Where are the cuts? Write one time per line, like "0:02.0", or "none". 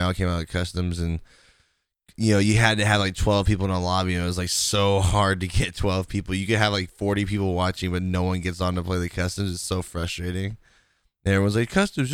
none